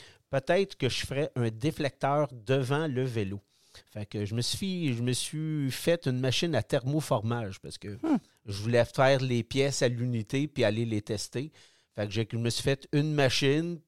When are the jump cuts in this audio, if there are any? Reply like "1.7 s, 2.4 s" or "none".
none